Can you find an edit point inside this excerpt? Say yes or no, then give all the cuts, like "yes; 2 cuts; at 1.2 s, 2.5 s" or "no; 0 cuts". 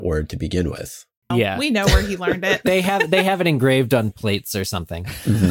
yes; 1 cut; at 1.3 s